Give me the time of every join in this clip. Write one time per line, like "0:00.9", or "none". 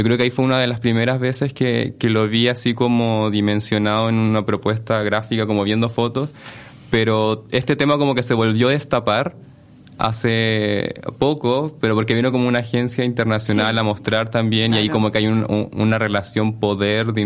none